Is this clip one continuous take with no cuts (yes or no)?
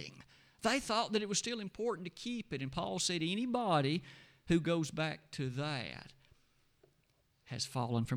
yes